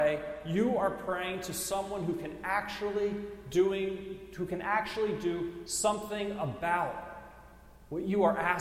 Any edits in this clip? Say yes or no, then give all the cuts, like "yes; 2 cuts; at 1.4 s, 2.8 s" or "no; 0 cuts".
no; 0 cuts